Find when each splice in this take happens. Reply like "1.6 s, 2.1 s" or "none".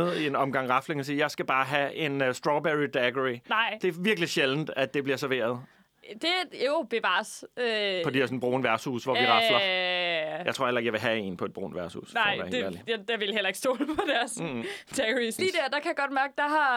15.4 s